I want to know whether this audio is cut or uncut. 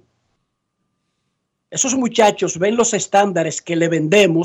uncut